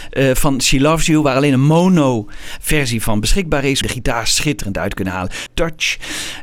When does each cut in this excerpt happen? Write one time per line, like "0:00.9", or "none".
0:03.8
0:05.5